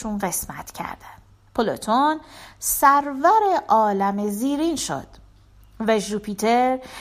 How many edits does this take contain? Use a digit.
1